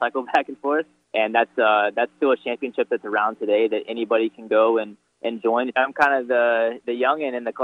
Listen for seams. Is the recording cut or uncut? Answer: cut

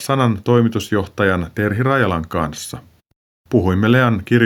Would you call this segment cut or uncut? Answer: uncut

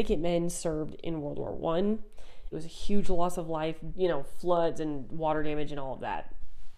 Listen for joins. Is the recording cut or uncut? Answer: cut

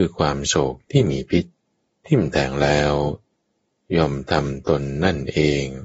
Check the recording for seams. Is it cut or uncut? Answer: uncut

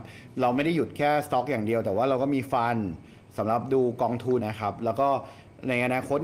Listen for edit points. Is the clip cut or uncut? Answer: cut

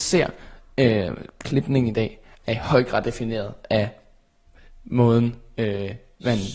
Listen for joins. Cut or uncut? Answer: uncut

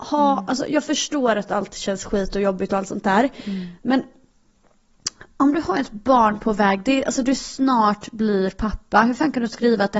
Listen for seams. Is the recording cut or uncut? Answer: uncut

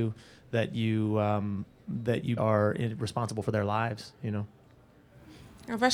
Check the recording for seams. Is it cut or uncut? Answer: cut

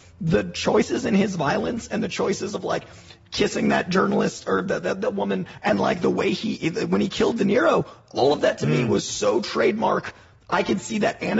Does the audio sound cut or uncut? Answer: uncut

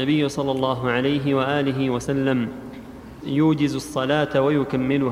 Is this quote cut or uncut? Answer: cut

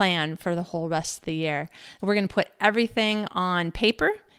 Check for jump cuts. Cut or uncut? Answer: cut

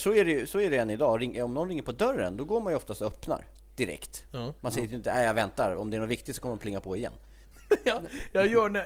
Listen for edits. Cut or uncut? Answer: cut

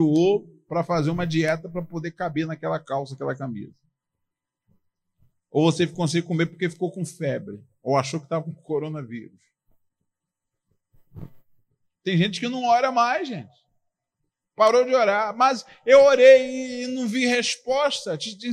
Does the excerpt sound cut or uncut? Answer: uncut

